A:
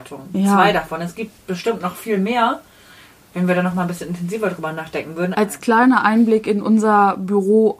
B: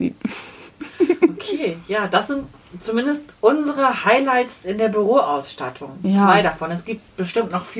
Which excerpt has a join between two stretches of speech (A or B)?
A